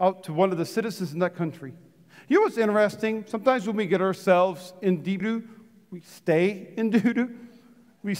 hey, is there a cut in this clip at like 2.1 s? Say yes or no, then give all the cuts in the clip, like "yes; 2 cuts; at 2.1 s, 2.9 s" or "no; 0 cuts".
no; 1 cut; at 5.2 s